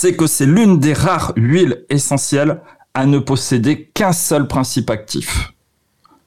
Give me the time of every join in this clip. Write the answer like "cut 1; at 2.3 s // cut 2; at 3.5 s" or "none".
none

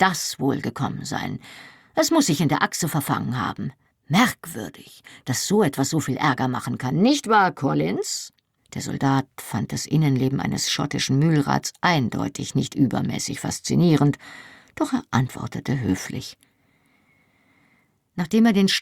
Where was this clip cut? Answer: cut 1; at 8.6 s

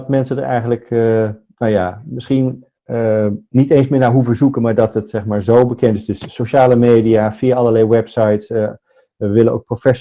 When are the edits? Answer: none

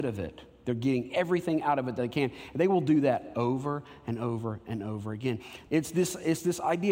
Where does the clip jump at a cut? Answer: cut 1; at 5.7 s

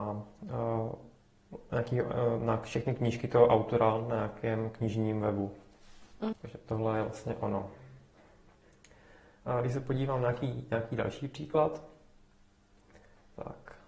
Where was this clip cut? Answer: cut 1; at 6.3 s

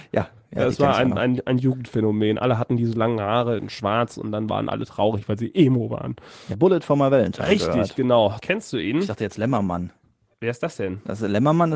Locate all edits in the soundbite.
cut 1; at 6.5 s // cut 2; at 8.4 s

